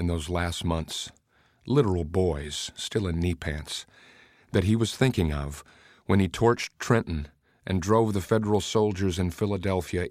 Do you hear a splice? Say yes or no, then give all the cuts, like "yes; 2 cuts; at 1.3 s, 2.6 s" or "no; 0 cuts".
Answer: no; 0 cuts